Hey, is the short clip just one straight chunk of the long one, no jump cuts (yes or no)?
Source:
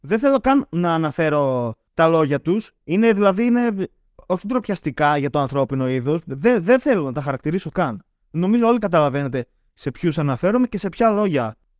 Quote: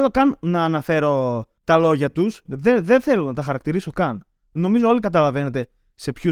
no